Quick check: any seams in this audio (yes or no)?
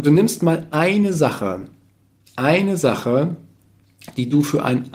no